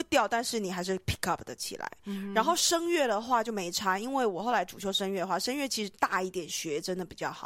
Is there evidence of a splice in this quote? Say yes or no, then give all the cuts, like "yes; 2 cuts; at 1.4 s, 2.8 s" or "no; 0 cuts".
no; 0 cuts